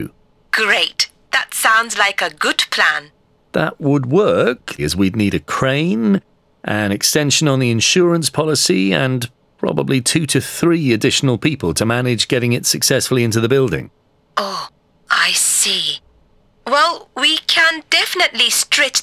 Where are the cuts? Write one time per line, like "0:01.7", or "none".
0:04.8